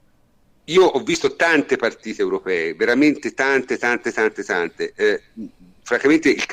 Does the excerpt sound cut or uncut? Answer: uncut